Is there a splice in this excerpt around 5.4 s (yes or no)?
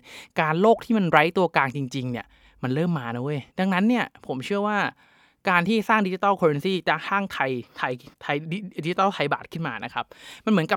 no